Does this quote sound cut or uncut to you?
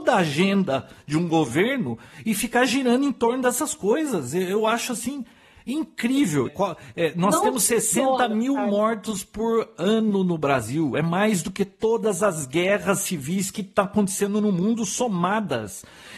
cut